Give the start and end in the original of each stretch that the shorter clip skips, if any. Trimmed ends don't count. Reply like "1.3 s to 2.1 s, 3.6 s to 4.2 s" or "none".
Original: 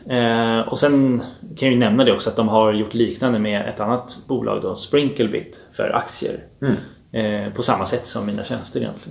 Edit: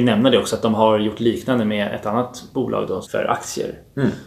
4.8 s to 5.7 s